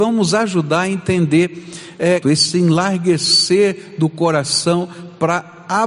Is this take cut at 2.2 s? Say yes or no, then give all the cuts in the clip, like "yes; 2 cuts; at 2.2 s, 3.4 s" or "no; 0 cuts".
yes; 1 cut; at 2.2 s